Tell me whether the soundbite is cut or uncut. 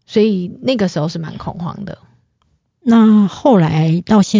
uncut